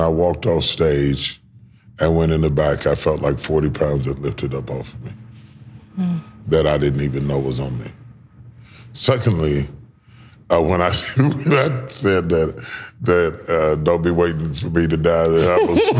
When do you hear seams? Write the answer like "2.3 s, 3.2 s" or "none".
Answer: none